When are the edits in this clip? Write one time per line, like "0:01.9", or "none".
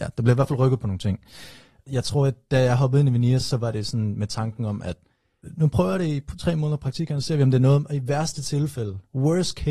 none